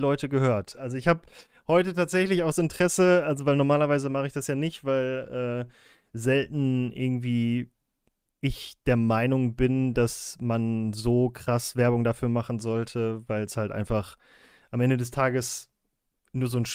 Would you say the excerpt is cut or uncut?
uncut